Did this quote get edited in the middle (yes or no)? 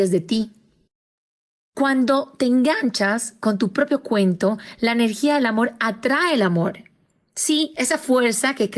yes